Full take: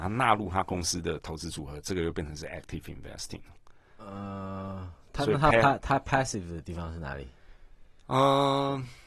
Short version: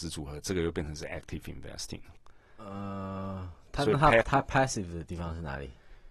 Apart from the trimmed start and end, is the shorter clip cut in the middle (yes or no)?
yes